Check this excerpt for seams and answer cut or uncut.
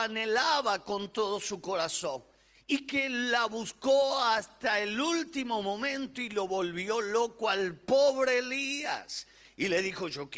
uncut